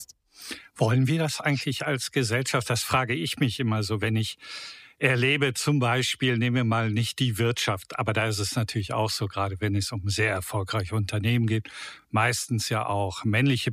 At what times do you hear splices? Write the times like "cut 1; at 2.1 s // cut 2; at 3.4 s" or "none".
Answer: none